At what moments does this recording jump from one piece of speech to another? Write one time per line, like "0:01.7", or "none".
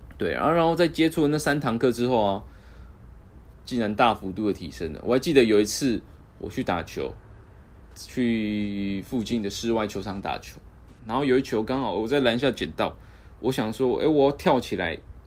0:03.5